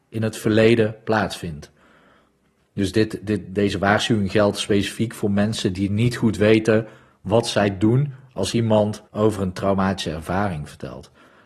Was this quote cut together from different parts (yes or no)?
yes